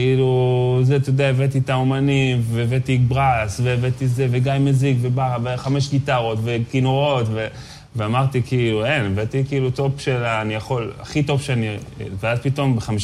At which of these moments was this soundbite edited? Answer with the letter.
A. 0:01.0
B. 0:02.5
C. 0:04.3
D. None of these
D